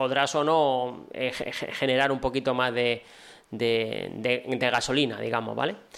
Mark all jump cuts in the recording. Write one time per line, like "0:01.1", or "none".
none